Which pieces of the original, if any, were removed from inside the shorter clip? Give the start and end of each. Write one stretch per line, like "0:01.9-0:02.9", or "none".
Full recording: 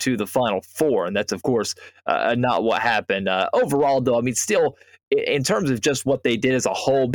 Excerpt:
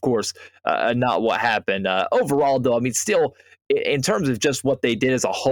none